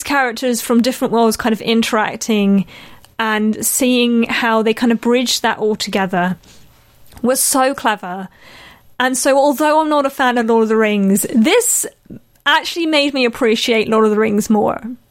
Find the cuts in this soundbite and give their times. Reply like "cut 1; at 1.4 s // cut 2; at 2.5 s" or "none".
none